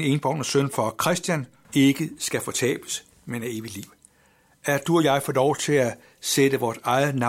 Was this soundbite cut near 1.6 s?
yes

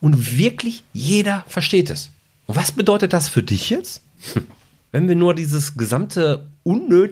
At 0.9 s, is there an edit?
no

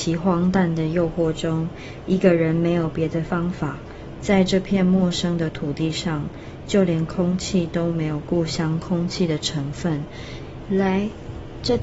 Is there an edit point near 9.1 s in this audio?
no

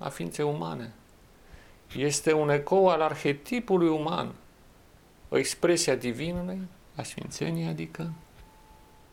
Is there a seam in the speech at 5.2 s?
yes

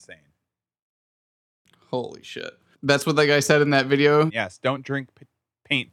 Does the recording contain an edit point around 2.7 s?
yes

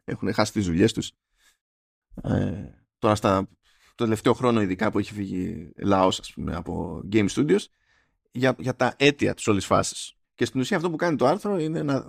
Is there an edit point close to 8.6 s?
yes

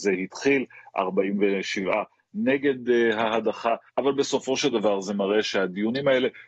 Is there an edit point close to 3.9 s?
yes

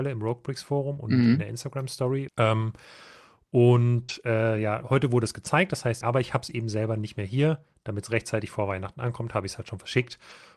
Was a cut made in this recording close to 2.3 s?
yes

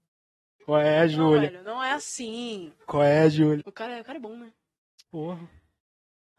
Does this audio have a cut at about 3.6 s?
yes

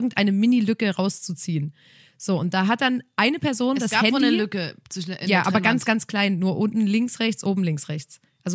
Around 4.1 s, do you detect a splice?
no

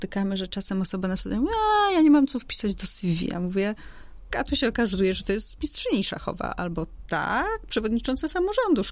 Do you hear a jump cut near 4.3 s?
yes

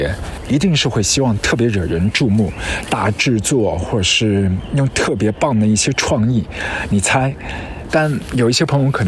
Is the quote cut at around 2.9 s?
no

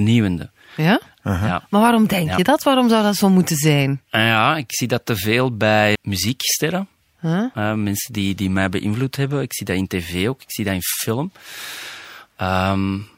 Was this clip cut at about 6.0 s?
yes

